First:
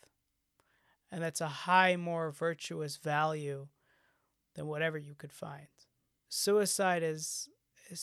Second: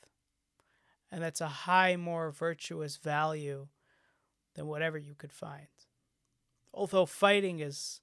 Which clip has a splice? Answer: first; 1 cut; at 6.2 s

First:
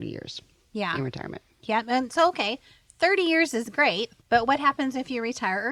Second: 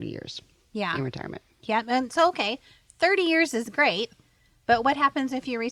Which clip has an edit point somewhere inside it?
first; 1 cut; at 4.2 s

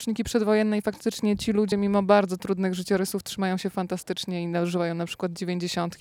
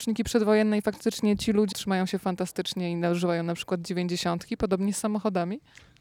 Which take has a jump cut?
second; 1 cut; at 1.7 s

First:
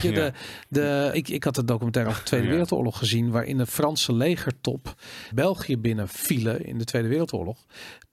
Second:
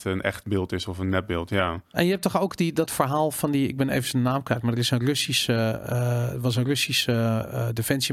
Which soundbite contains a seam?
first; 2 cuts; at 1.1 s, 5.3 s

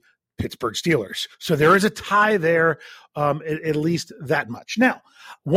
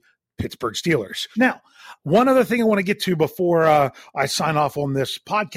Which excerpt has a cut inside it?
second; 1 cut; at 1.3 s

